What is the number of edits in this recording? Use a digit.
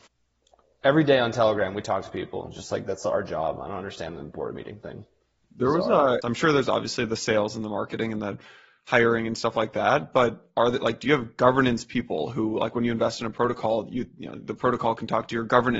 1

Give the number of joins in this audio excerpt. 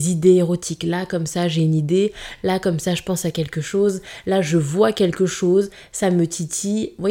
0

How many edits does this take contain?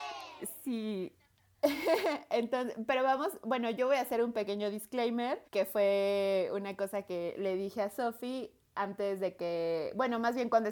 1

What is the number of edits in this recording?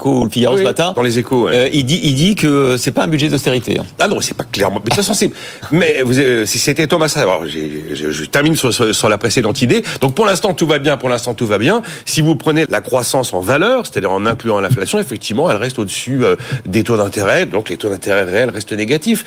1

